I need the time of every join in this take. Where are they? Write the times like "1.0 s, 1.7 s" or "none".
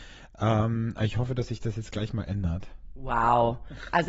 none